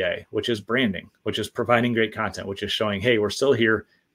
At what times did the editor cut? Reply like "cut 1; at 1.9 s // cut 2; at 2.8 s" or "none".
none